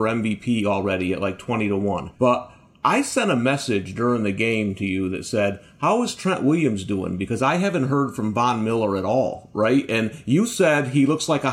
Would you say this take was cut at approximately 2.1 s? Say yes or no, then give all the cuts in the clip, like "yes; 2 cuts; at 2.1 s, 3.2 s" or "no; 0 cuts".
yes; 1 cut; at 2.1 s